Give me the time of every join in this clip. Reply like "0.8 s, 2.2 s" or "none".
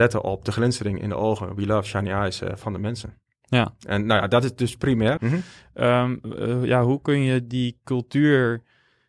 5.2 s